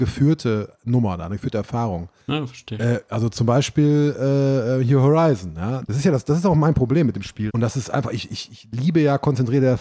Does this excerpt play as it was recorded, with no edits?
no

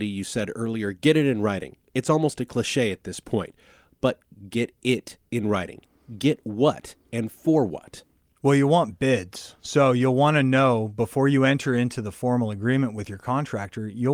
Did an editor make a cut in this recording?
no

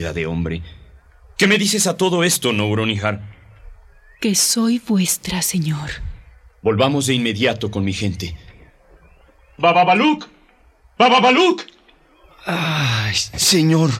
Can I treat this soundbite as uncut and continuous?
yes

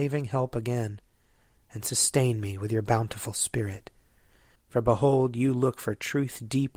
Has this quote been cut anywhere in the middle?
yes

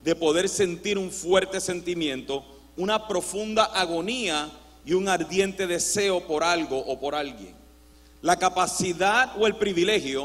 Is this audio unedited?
yes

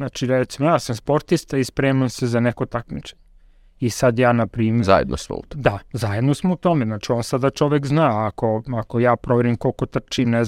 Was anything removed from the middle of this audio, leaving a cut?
no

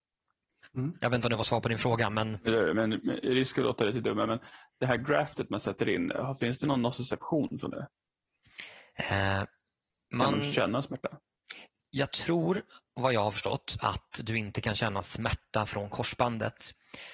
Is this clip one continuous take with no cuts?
yes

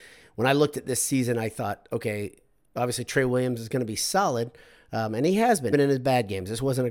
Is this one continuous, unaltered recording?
no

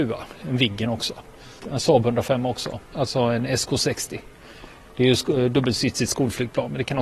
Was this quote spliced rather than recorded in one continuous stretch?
yes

